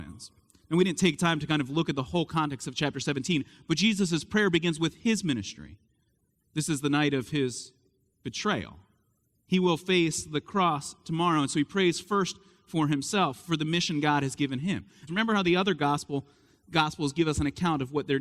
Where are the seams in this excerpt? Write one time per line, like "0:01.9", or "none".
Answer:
0:15.1